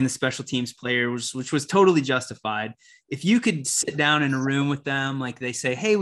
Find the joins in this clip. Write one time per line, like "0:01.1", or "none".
none